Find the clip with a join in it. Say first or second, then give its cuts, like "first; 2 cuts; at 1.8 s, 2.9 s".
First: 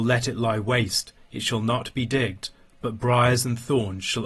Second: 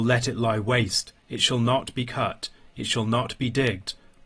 first; 1 cut; at 1.2 s